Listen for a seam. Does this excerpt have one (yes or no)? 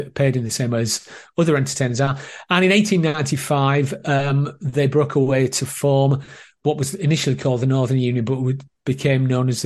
no